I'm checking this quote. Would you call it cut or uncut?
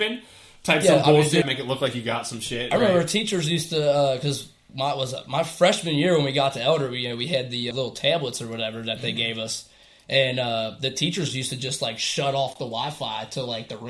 cut